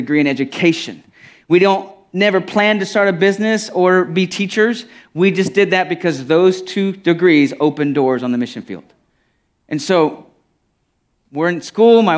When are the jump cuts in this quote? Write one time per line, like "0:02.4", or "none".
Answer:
none